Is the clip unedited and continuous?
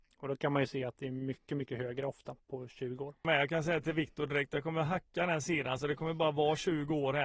yes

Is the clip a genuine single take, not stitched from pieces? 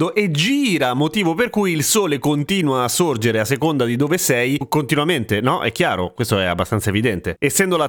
yes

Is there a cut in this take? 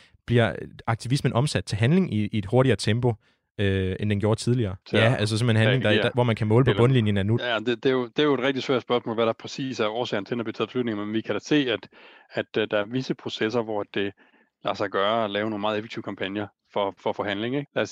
yes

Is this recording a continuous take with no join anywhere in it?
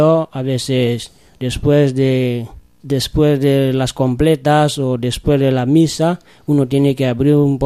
no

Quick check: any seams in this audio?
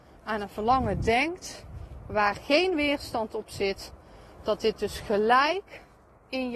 no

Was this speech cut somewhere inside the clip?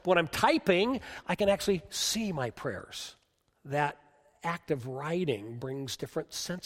yes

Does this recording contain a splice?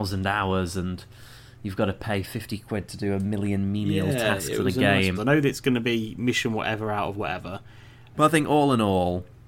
yes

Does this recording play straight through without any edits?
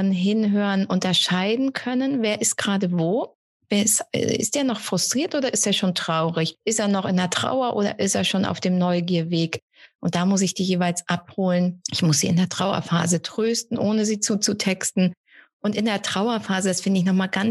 yes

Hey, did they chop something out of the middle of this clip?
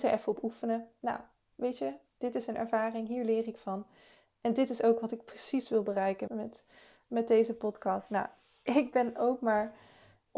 yes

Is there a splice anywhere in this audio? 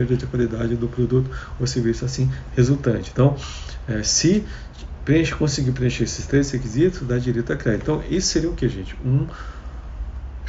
no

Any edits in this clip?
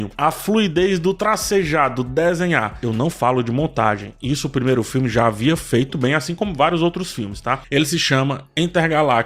yes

